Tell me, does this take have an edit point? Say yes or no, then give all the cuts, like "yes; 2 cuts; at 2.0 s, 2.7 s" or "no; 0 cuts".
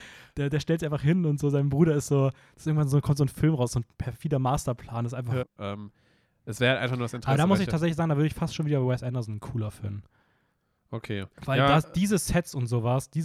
yes; 1 cut; at 5.4 s